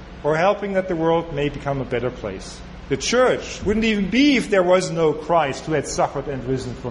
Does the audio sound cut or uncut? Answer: cut